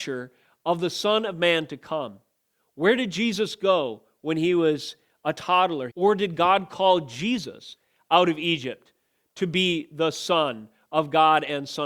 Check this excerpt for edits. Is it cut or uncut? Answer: cut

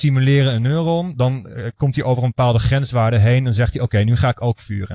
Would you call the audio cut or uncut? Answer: uncut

